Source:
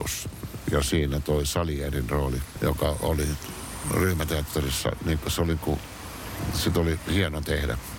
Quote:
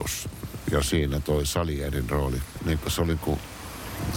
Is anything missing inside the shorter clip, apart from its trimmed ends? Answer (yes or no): yes